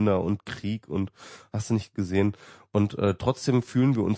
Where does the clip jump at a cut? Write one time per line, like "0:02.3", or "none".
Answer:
none